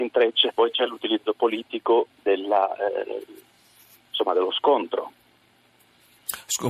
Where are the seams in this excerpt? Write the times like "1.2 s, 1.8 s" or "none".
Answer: 2.1 s